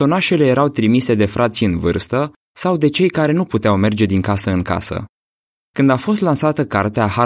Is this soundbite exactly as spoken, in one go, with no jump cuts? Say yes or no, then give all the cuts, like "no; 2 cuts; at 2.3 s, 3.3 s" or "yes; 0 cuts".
no; 1 cut; at 5.6 s